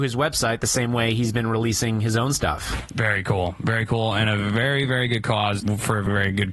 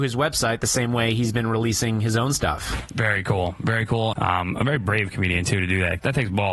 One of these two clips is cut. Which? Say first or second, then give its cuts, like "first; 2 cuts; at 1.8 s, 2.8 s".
second; 1 cut; at 4.1 s